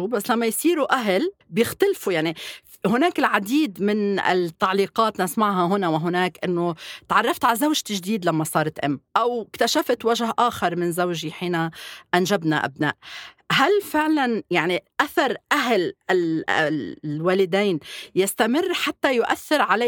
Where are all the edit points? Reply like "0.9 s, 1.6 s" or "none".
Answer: 1.4 s, 9.1 s